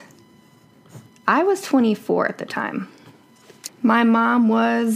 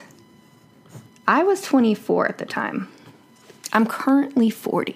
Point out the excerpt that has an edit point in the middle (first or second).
first